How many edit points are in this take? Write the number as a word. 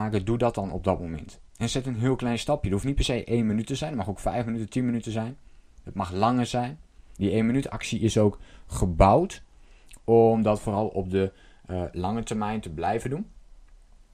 two